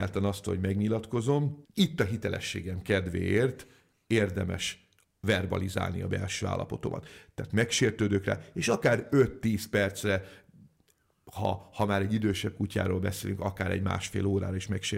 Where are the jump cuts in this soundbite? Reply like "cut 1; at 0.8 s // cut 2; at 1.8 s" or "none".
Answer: none